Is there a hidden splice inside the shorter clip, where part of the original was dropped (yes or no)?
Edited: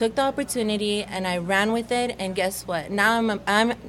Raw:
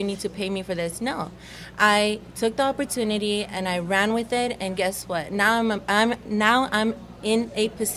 no